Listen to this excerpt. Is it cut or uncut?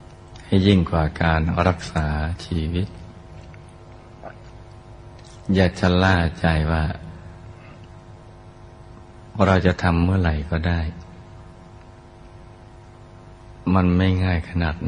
uncut